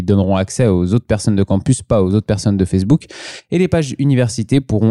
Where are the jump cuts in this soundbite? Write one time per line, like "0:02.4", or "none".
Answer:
none